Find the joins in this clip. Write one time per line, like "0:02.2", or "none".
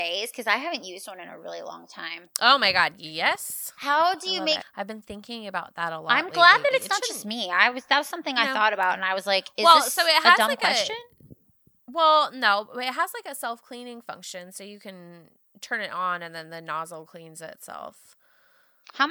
0:04.6